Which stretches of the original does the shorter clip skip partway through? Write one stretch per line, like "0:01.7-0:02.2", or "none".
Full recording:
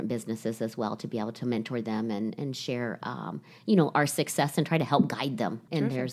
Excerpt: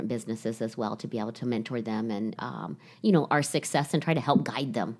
0:02.4-0:03.0